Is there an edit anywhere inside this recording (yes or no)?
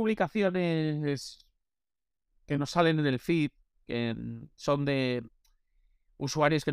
no